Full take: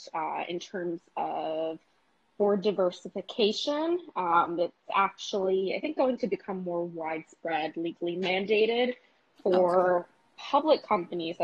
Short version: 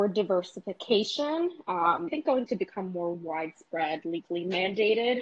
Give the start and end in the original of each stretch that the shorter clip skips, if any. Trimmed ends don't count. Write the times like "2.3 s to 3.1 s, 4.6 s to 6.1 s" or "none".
4.6 s to 5.8 s

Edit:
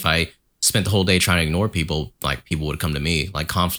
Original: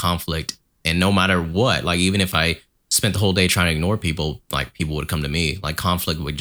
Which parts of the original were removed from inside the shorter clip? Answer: none

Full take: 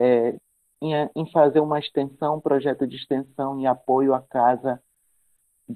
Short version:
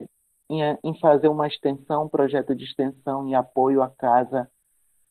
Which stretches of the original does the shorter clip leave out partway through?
none

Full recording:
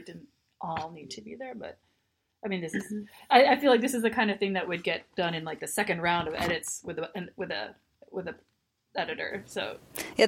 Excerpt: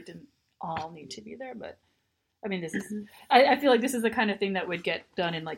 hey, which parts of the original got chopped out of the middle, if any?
none

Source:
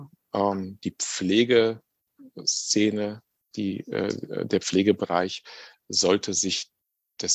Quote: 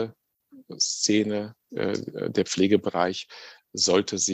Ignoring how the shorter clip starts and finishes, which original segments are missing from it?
3.4 s to 3.8 s

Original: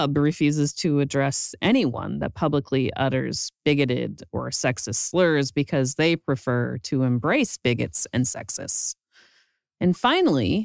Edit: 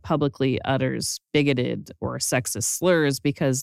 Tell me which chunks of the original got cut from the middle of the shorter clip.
none

